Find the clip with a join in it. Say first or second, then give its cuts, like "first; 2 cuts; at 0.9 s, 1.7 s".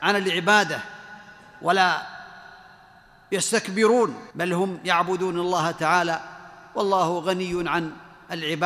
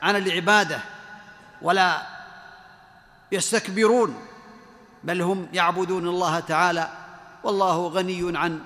first; 1 cut; at 4.3 s